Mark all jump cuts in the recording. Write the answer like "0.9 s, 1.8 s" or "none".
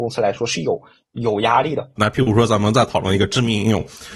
2.0 s